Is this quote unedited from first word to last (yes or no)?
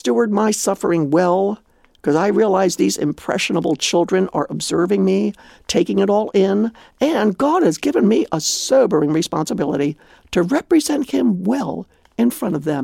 yes